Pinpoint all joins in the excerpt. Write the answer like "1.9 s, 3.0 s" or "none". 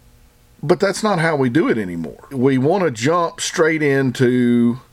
2.3 s